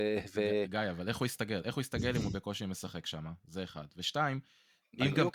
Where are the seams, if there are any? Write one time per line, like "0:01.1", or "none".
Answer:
none